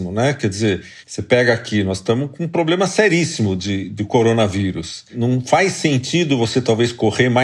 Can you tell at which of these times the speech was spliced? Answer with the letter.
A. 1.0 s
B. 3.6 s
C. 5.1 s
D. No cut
D